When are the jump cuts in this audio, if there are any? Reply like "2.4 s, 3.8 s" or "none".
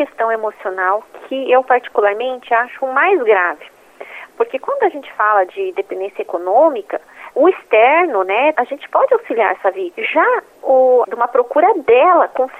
8.5 s, 11.0 s